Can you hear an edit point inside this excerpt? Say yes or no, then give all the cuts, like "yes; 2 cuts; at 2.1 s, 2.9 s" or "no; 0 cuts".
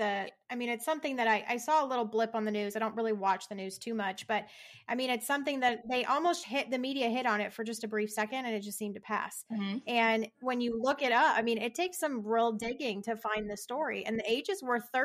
yes; 1 cut; at 6.4 s